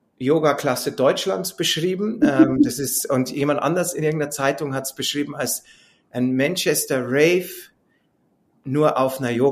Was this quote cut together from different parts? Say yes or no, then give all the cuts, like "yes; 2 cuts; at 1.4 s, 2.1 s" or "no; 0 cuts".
no; 0 cuts